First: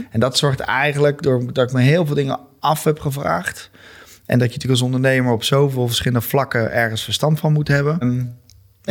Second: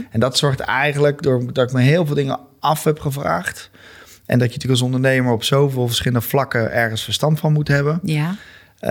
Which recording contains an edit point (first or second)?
first